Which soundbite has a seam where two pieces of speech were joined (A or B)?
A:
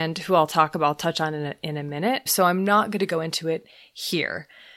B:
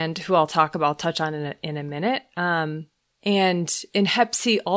A